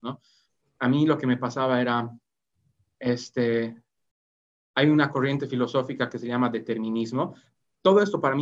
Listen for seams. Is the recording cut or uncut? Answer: uncut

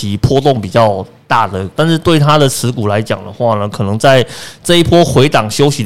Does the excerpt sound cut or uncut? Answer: cut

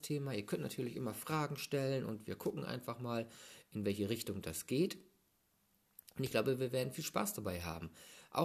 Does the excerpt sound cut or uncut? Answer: uncut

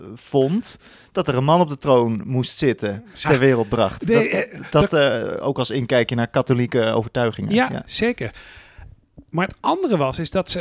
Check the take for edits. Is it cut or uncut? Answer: cut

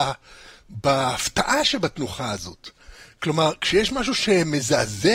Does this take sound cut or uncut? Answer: uncut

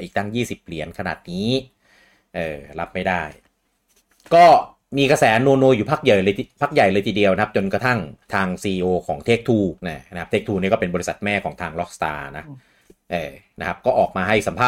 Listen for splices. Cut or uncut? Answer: cut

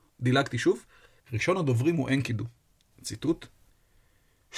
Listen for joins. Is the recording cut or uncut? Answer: cut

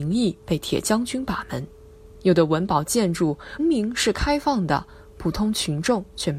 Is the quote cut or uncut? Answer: cut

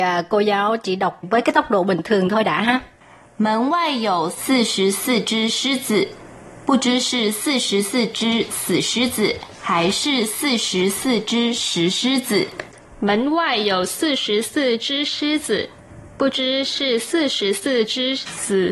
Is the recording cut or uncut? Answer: uncut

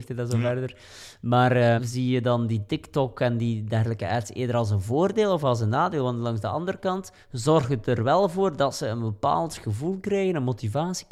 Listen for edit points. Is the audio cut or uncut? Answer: cut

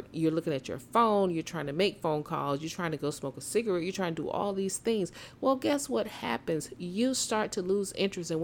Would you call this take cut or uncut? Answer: uncut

